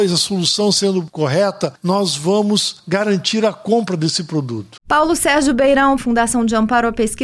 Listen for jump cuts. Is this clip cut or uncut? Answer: cut